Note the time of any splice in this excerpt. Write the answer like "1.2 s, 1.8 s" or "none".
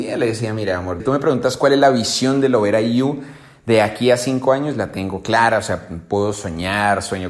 1.0 s